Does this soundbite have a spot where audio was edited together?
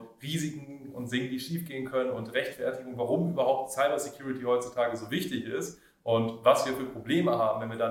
no; 0 cuts

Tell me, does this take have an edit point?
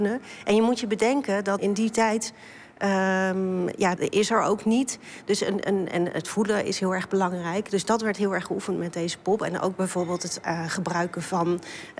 yes; 2 cuts; at 1.6 s, 4.0 s

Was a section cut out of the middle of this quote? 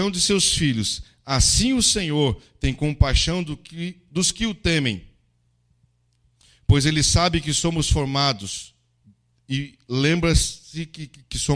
no; 0 cuts

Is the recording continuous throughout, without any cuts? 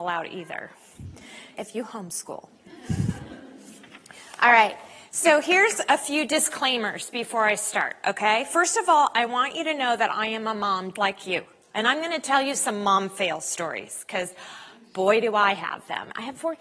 no; 2 cuts; at 1.5 s, 11.0 s

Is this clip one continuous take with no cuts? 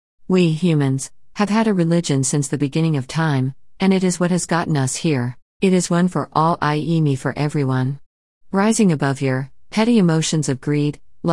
no; 3 cuts; at 5.6 s, 8.4 s, 9.7 s

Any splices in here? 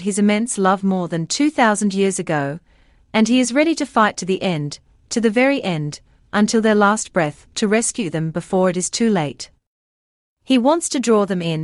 no; 0 cuts

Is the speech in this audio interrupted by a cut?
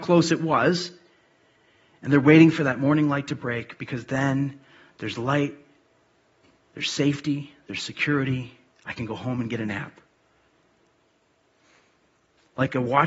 no; 0 cuts

